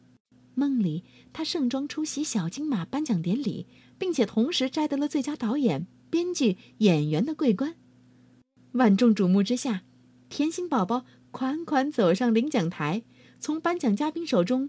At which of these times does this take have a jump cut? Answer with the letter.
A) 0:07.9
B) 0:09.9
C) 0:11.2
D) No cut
D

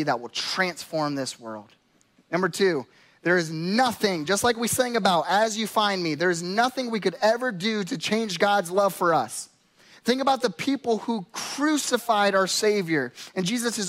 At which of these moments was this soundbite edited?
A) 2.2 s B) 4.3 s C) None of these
A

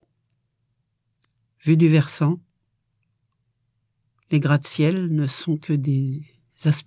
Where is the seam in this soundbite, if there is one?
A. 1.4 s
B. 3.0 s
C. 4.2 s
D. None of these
A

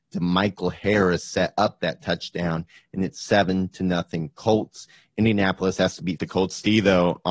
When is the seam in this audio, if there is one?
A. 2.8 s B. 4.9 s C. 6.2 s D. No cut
C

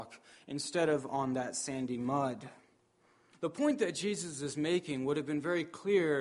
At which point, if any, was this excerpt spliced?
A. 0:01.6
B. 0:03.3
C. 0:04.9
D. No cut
B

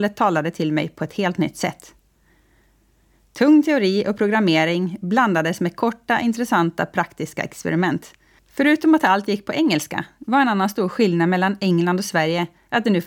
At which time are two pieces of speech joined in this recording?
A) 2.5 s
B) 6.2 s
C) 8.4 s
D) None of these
C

